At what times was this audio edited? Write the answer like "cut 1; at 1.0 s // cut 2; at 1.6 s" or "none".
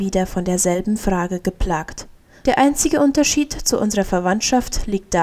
cut 1; at 2.4 s

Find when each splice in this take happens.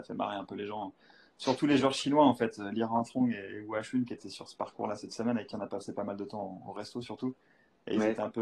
none

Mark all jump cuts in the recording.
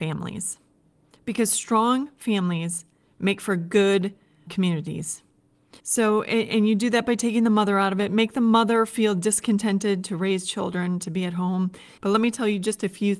cut 1; at 4.5 s // cut 2; at 5.8 s // cut 3; at 12.0 s

